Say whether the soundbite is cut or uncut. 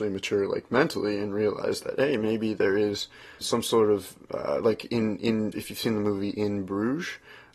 cut